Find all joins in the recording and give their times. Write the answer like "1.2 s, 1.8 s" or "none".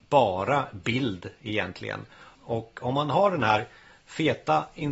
2.4 s